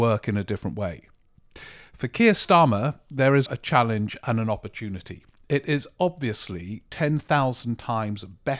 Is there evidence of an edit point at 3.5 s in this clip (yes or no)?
yes